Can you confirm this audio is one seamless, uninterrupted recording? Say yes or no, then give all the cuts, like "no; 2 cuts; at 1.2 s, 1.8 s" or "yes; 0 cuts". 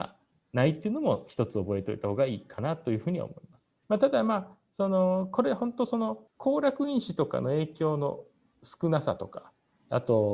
no; 2 cuts; at 3.8 s, 6.3 s